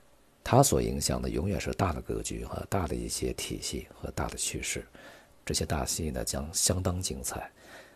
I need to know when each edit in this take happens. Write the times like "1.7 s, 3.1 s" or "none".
5.4 s